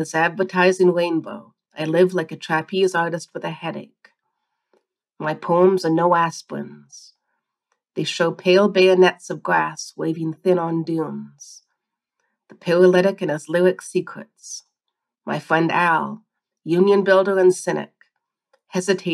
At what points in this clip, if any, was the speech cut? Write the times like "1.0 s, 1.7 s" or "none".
none